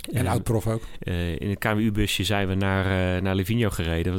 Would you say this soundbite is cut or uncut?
cut